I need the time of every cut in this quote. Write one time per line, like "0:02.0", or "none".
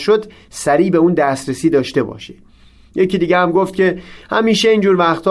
none